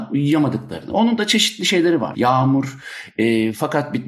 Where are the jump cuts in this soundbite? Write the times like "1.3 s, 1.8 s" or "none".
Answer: 2.1 s